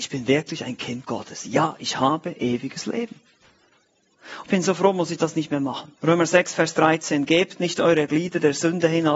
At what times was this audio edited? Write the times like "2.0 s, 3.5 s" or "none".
4.4 s, 6.0 s